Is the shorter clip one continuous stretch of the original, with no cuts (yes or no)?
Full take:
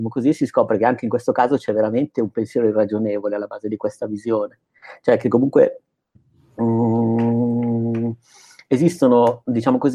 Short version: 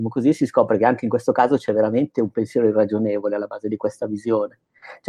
yes